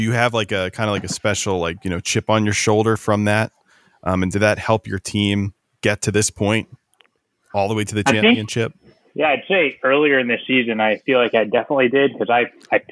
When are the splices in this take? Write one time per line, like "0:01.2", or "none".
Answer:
none